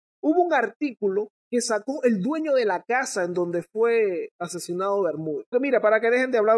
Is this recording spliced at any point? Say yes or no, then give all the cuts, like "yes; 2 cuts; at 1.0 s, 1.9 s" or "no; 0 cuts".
yes; 2 cuts; at 1.4 s, 5.5 s